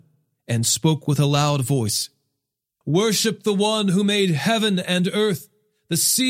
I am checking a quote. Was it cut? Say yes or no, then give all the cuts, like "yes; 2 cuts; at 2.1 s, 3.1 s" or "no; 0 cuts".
yes; 1 cut; at 2.8 s